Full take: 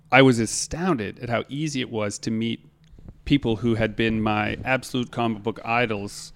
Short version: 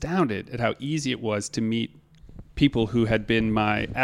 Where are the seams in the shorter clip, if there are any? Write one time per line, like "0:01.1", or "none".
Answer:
none